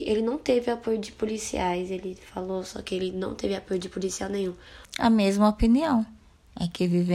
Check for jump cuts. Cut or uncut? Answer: cut